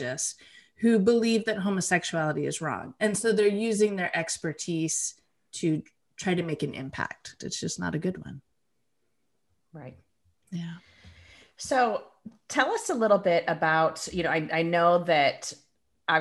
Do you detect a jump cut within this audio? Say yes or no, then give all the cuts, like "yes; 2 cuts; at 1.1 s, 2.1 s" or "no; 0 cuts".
yes; 1 cut; at 7.4 s